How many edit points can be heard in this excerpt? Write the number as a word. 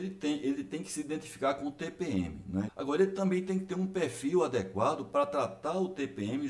one